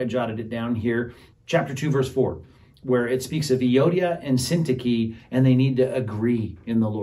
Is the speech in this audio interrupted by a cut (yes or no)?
yes